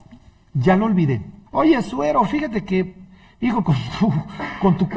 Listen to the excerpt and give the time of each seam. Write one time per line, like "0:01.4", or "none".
0:01.5
0:03.6